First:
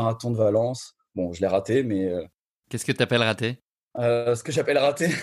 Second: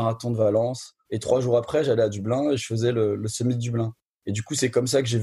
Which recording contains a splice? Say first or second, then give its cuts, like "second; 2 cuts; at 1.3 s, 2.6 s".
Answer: second; 1 cut; at 1.1 s